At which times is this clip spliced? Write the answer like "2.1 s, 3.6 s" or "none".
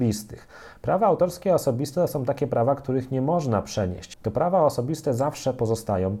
4.1 s